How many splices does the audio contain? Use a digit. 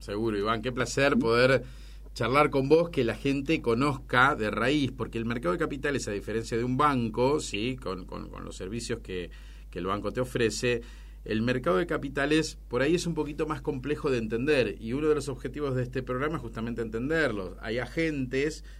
0